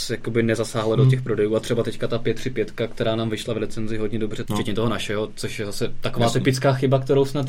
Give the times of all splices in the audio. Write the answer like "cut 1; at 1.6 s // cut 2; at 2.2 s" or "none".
cut 1; at 4.5 s

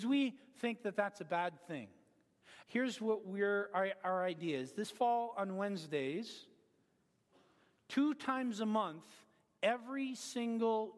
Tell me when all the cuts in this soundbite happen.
cut 1; at 2.6 s

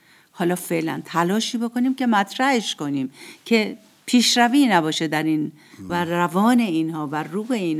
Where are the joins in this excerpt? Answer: cut 1; at 5.9 s

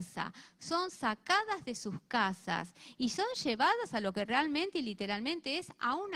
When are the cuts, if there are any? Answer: none

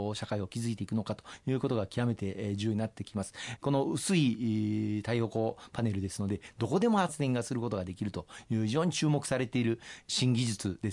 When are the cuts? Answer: cut 1; at 3.6 s // cut 2; at 6.5 s

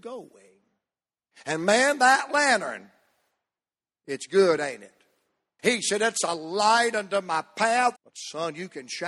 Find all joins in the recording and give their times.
cut 1; at 1.3 s // cut 2; at 5.6 s // cut 3; at 8.0 s

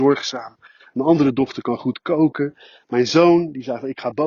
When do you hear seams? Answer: none

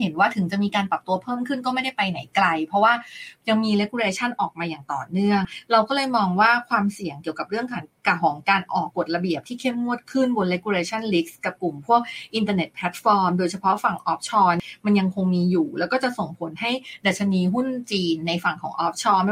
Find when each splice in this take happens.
cut 1; at 8.9 s

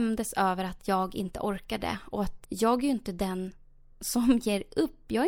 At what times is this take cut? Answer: cut 1; at 2.4 s

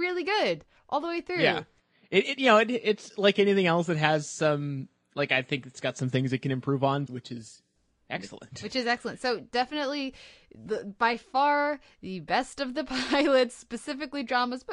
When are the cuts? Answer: cut 1; at 7.1 s

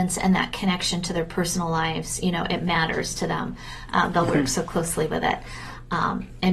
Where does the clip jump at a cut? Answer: cut 1; at 3.9 s

